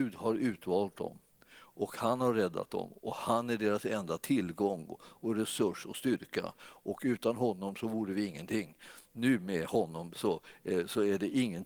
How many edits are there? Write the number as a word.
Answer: zero